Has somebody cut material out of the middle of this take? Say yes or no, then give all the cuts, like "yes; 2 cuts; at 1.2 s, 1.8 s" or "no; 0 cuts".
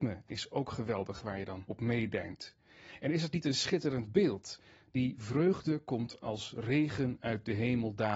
no; 0 cuts